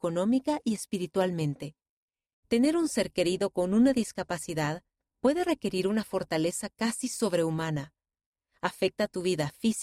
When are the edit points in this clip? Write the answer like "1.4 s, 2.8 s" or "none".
2.3 s